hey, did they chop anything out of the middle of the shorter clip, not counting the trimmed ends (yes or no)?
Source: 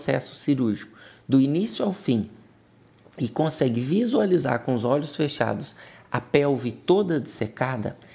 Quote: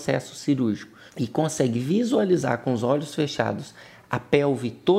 yes